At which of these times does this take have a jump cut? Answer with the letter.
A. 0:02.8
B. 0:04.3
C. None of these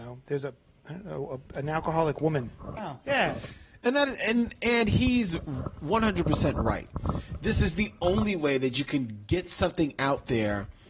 A